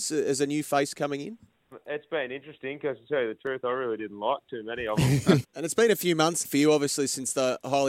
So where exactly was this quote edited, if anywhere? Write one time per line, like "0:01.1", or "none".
0:01.7
0:05.4
0:06.4